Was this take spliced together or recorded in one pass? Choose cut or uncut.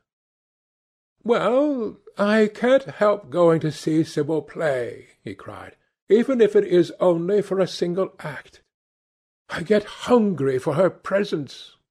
uncut